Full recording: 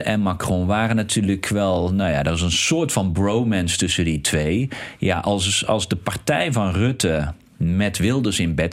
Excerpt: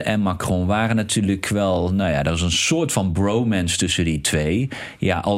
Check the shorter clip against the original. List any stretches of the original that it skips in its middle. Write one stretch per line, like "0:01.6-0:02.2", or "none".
none